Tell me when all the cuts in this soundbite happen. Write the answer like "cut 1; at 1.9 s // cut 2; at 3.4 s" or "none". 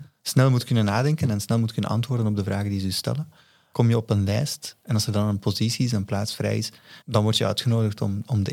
cut 1; at 3.7 s // cut 2; at 7.0 s